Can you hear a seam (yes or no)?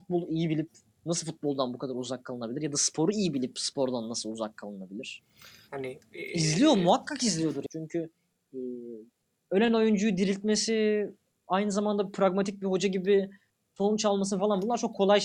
yes